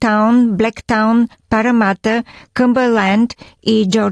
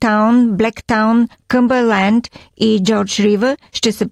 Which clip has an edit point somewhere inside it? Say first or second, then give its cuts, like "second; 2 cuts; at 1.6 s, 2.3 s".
second; 1 cut; at 1.4 s